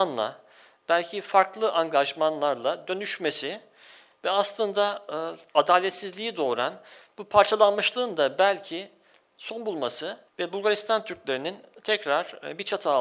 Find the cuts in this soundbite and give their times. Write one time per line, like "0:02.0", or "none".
0:05.5
0:10.3